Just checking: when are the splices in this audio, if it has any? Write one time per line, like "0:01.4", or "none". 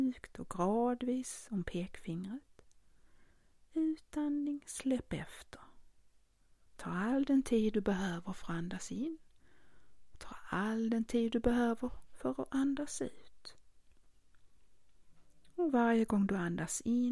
none